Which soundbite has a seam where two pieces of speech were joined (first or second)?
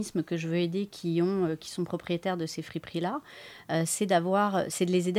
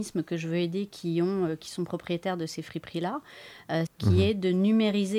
second